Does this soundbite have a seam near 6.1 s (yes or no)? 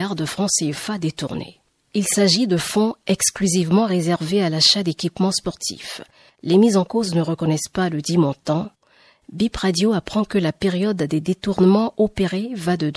no